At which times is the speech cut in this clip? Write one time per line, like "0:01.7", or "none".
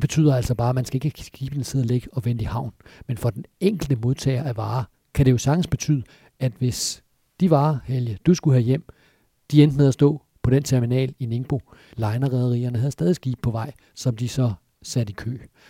0:11.9